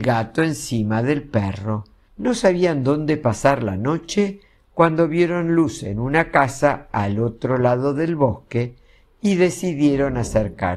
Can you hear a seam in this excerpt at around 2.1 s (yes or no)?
yes